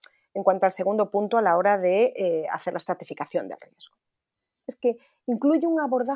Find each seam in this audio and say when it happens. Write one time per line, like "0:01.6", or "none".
0:04.6